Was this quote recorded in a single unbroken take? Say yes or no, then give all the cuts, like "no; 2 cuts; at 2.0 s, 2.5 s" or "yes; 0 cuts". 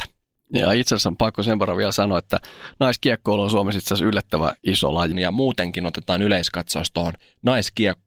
no; 1 cut; at 5.1 s